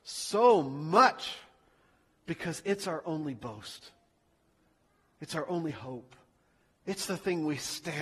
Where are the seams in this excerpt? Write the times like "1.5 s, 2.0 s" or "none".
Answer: none